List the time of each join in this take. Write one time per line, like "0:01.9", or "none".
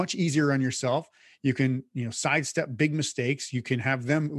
none